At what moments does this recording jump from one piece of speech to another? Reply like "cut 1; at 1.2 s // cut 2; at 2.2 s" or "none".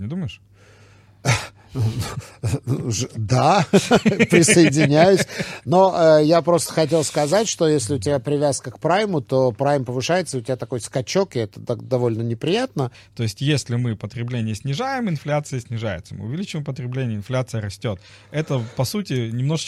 cut 1; at 12.9 s